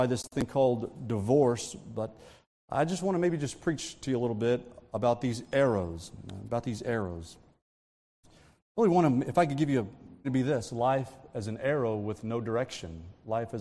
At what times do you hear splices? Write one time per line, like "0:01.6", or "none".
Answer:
0:10.2